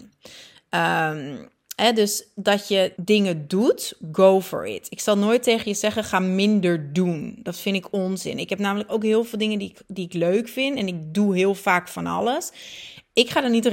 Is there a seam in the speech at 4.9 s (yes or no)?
no